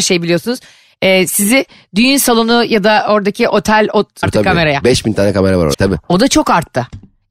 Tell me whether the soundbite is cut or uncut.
cut